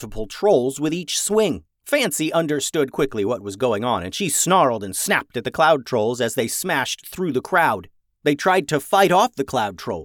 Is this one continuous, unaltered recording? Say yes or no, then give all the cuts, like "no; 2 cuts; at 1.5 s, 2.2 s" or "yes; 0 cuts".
no; 2 cuts; at 1.7 s, 8.2 s